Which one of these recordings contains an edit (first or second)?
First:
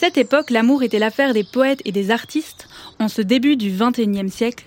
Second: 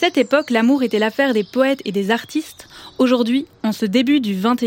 first